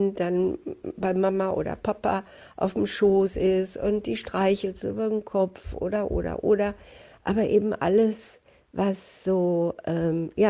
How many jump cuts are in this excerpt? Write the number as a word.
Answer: one